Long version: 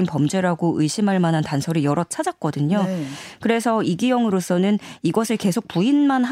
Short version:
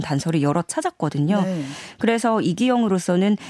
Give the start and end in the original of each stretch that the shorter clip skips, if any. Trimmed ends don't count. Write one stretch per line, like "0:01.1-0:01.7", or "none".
none